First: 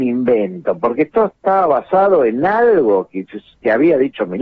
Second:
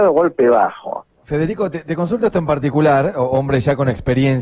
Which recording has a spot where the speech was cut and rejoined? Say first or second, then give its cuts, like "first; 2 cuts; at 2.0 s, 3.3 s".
second; 1 cut; at 1.1 s